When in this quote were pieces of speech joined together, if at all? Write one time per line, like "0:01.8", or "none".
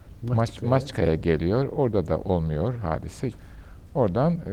0:03.3